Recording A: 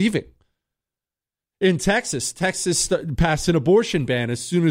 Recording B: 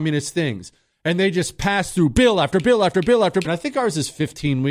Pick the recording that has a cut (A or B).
B